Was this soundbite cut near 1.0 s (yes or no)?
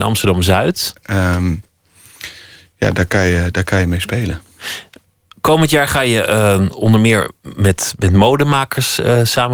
yes